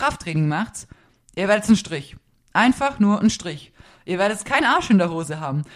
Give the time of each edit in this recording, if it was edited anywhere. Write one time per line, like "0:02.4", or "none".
none